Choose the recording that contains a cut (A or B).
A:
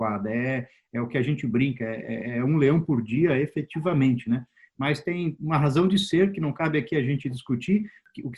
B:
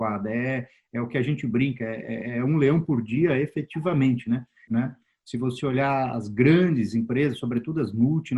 B